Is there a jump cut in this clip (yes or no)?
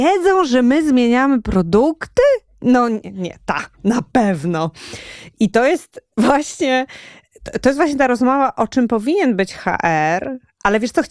no